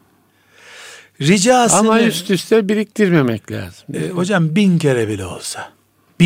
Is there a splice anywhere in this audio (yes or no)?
no